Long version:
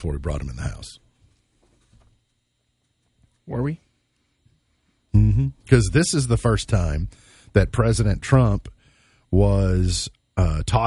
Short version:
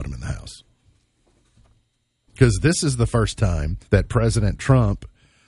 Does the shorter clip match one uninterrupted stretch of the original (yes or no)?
no